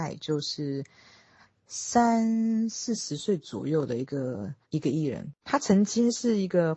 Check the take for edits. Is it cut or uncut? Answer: cut